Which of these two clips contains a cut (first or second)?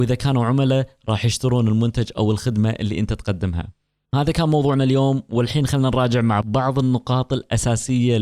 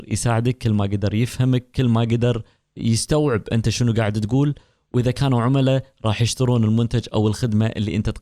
first